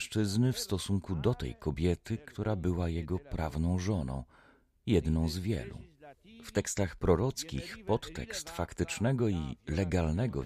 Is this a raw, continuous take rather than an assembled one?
yes; 0 cuts

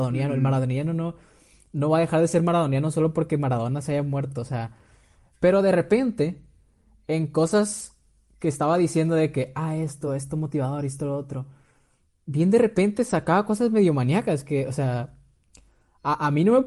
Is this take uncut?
yes; 0 cuts

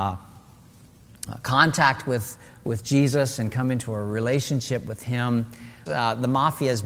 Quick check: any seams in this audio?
yes; 1 cut; at 5.9 s

